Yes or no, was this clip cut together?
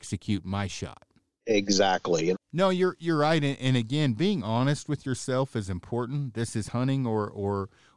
yes